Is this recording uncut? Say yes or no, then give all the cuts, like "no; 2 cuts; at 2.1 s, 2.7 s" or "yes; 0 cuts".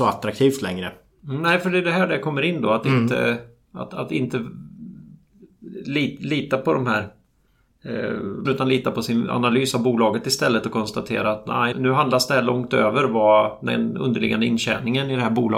no; 2 cuts; at 8.4 s, 11.7 s